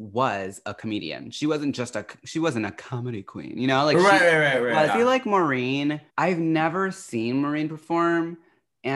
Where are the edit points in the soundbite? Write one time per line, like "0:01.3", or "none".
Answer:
0:04.9
0:06.1